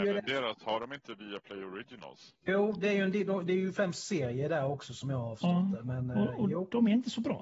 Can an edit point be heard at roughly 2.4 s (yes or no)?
yes